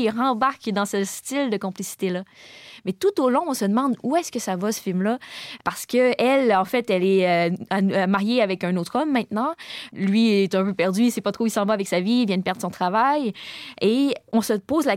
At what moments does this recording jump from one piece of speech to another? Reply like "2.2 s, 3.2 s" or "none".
none